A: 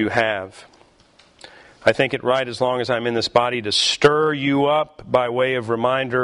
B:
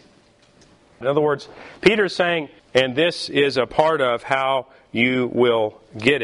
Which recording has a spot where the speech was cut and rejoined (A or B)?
B